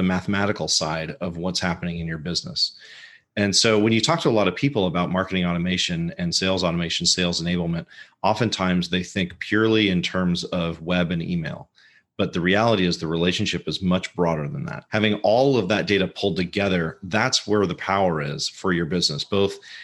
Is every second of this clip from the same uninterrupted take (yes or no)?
no